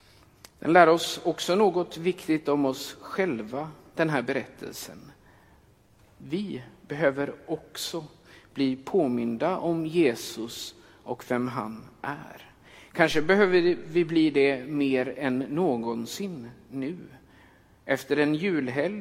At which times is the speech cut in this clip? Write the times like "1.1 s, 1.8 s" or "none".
none